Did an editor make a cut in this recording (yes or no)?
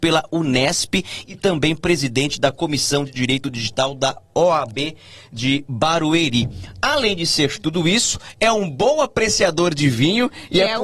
no